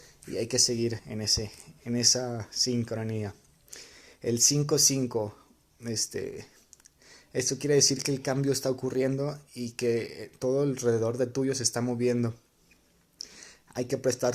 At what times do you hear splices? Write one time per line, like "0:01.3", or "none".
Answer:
none

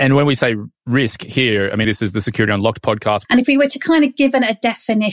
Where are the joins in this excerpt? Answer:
0:01.8
0:03.2

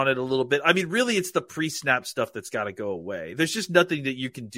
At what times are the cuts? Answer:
none

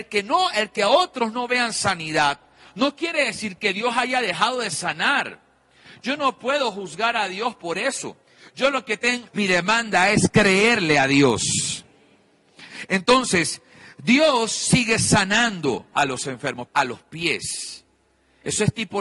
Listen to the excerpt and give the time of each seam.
0:09.3
0:16.7

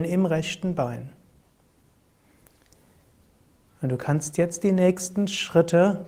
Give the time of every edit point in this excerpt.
0:03.7

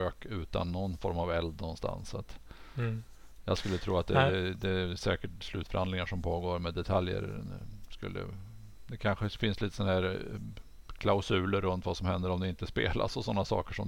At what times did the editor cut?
none

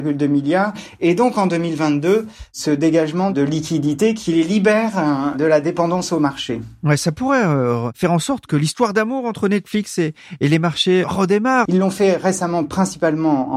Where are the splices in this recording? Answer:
0:11.7

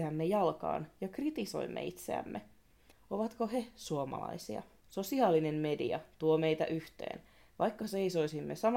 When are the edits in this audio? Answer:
0:02.9
0:04.8

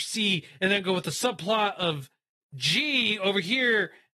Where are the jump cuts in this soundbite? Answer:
none

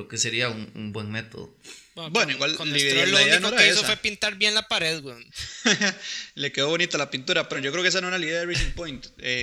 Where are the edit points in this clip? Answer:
0:07.5

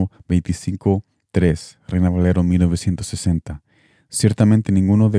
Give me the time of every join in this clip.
none

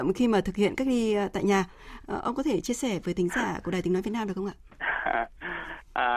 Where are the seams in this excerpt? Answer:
0:02.0

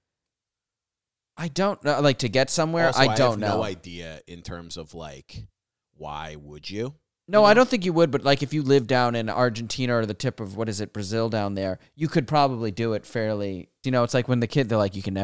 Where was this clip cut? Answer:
0:13.8

